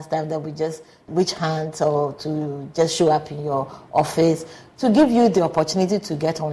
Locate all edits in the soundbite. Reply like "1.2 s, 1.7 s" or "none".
1.1 s